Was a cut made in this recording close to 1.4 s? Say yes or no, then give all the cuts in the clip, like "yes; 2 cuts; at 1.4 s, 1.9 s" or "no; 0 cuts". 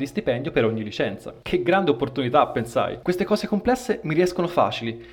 no; 0 cuts